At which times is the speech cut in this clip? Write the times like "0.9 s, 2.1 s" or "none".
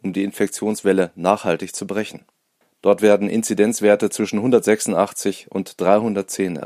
2.6 s

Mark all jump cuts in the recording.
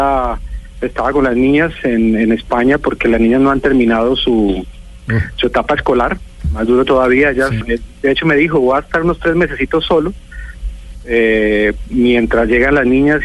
6.4 s, 7.6 s

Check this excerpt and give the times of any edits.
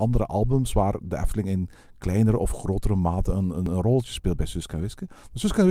none

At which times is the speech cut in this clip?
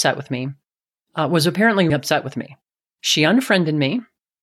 1.9 s

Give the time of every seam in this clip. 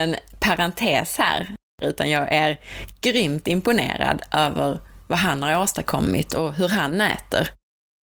1.8 s

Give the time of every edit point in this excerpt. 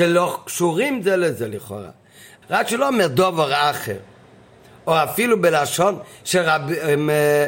2.4 s

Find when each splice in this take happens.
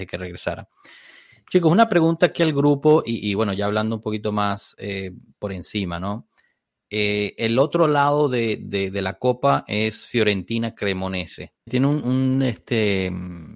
11.7 s

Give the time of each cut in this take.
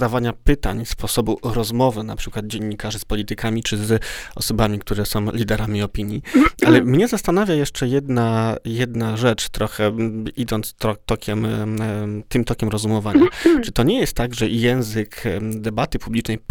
none

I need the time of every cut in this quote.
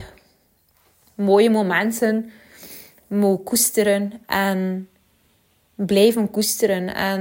none

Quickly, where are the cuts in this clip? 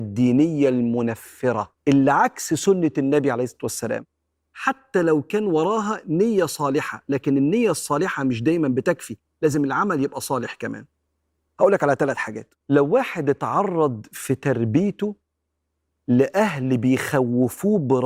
1.8 s, 12.6 s

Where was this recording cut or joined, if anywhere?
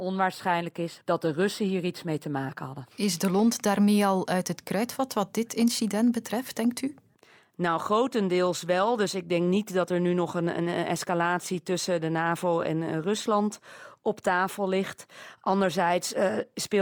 1.0 s

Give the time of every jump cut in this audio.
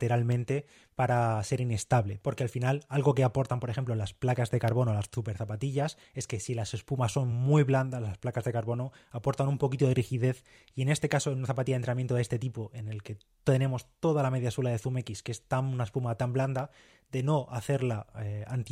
none

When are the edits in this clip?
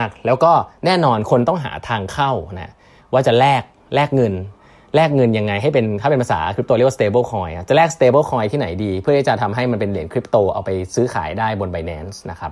none

